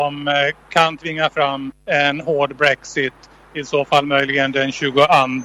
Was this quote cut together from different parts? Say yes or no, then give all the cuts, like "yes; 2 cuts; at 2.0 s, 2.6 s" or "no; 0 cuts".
yes; 1 cut; at 1.8 s